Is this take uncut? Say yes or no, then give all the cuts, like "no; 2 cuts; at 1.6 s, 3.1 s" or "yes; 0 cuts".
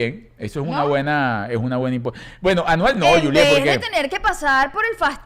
yes; 0 cuts